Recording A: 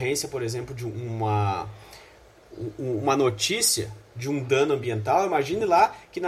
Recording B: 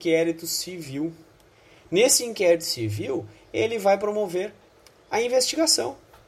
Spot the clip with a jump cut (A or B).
A